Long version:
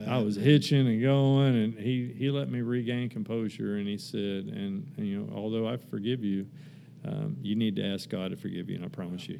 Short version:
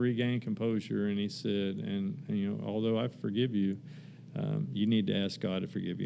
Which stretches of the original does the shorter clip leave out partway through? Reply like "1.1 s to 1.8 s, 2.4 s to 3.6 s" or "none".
none